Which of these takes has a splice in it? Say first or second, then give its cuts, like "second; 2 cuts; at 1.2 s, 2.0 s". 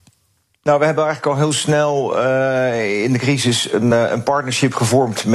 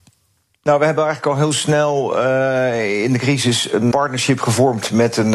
second; 1 cut; at 3.9 s